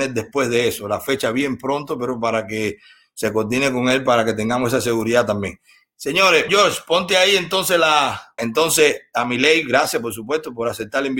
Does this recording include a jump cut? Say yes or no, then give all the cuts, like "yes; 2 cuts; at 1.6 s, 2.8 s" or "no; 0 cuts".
yes; 2 cuts; at 6.5 s, 8.4 s